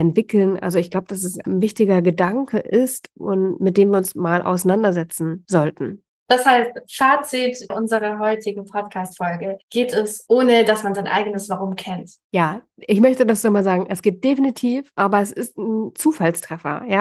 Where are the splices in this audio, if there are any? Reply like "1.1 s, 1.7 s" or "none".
1.4 s, 9.6 s